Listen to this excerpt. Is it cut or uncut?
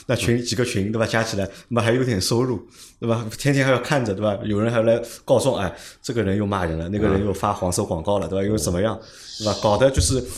uncut